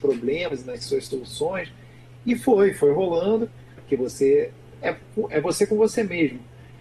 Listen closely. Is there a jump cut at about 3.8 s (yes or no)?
yes